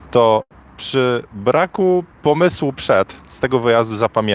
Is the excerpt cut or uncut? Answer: cut